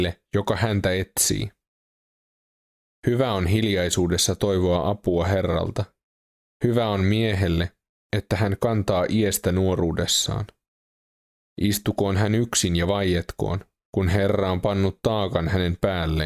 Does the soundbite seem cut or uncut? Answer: uncut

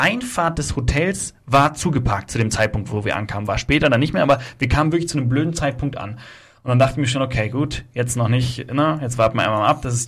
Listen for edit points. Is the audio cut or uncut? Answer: uncut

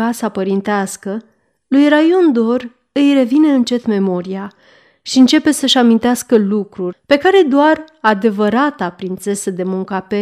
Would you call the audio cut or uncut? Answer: cut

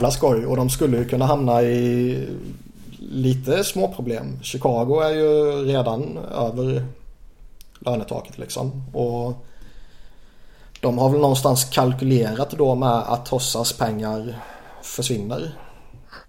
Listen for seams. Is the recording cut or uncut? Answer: uncut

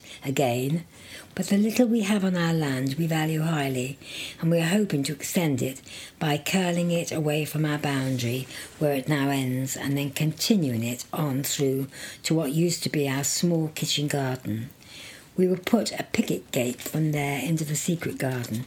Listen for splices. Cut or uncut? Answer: cut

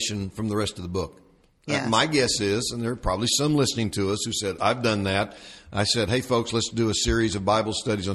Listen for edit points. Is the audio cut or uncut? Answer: cut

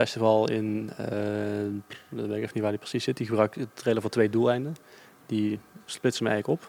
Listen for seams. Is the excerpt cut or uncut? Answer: uncut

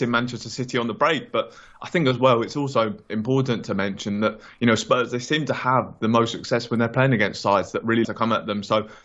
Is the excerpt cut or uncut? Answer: cut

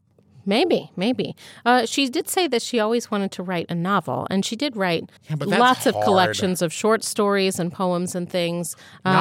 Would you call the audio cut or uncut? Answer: cut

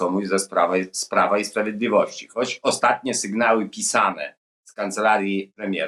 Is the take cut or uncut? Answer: uncut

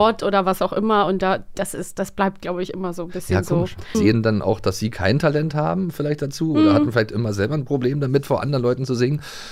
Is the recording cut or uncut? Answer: cut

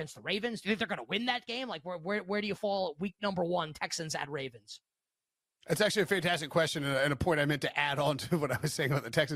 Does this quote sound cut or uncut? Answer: uncut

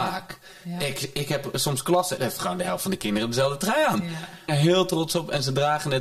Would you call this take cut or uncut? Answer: cut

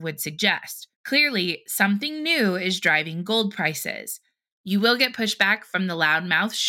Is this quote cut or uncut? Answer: cut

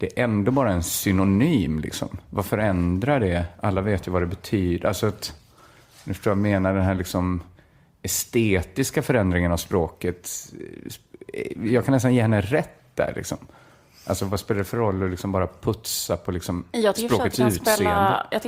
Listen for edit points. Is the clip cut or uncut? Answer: uncut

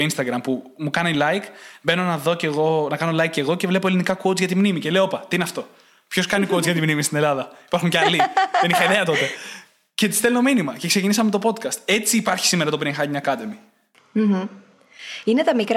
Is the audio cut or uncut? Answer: uncut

